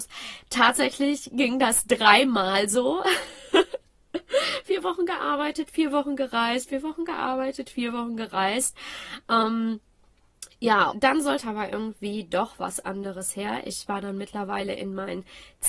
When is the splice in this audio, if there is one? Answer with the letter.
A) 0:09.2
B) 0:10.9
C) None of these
B